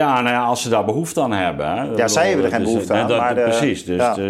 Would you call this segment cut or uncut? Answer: uncut